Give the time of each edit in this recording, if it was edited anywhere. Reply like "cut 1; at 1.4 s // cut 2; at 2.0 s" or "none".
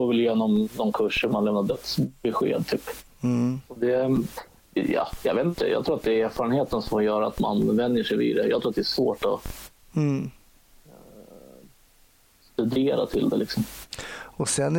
cut 1; at 3.1 s